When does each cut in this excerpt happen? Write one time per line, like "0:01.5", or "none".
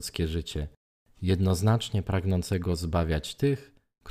none